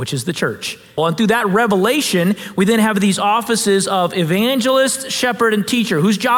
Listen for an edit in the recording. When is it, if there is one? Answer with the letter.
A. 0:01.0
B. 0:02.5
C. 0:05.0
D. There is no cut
A